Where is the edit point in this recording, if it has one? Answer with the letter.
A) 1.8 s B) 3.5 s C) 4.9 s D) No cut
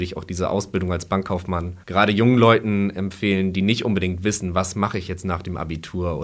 A